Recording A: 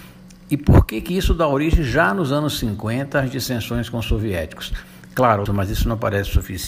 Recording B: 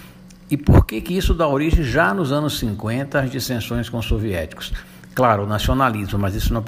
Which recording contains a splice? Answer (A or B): A